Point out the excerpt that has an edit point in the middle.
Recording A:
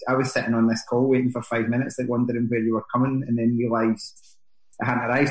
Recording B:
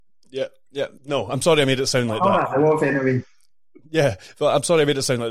B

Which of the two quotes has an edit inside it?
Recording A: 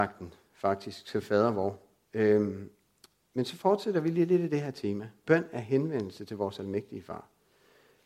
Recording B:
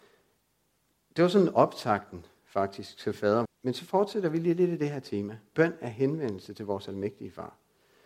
B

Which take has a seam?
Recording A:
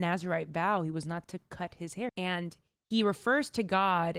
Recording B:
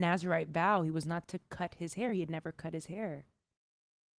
A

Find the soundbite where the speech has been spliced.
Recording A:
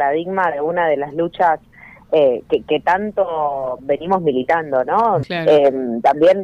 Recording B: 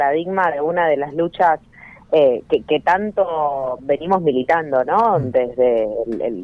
A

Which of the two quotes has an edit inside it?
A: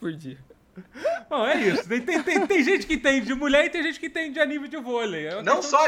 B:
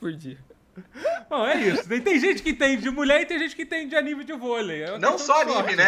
B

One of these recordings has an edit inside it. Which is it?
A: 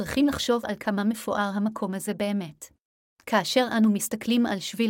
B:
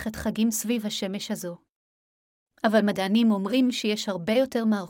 A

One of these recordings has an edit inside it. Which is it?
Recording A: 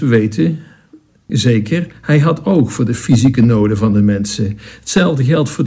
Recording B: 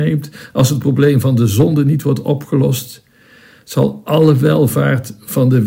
A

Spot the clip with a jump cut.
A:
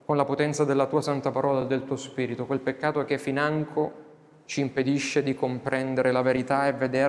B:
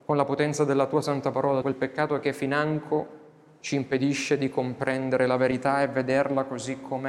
B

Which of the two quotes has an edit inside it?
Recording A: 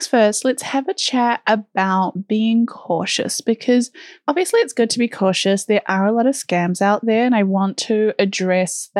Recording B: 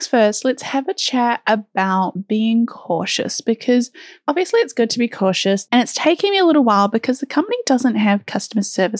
B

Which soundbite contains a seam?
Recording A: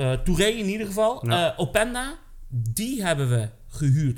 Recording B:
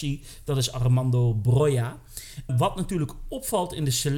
B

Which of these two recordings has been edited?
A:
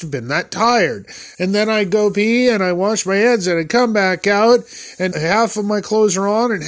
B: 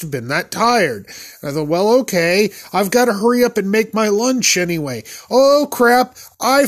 A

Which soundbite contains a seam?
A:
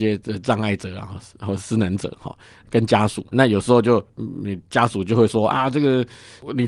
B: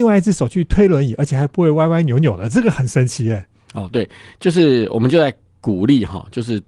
A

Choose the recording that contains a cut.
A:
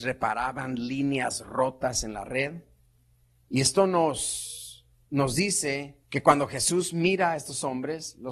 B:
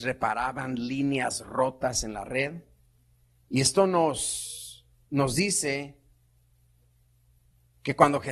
A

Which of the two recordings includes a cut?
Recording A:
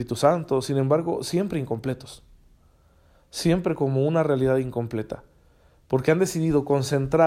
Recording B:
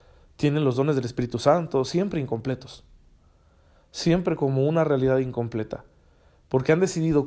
B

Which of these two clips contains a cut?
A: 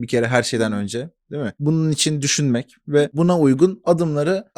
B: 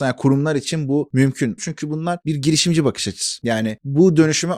B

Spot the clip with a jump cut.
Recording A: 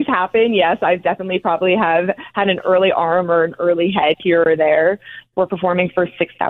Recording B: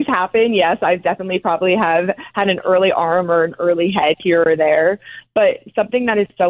A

